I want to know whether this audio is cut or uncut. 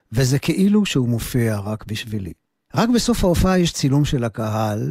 cut